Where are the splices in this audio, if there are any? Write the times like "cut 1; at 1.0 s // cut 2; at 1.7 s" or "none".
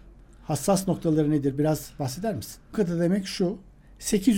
cut 1; at 2.7 s